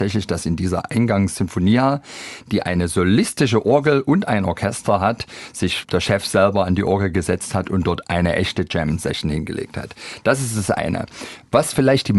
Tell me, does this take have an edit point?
no; 0 cuts

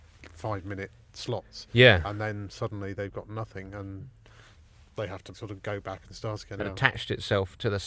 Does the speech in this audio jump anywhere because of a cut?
yes; 2 cuts; at 5.3 s, 6.6 s

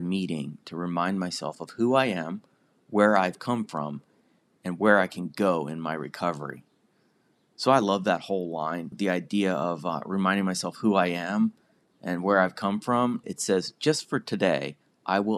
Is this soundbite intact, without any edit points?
no; 2 cuts; at 8.9 s, 13.2 s

